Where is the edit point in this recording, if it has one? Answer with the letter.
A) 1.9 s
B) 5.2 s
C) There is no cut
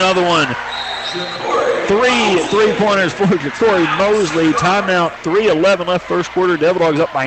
B